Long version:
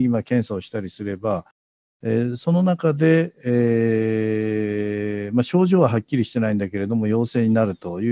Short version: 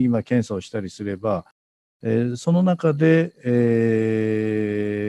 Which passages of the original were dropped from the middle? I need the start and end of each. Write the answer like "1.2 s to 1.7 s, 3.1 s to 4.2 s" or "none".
none